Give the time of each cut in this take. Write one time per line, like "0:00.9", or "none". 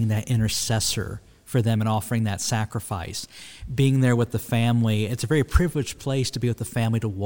none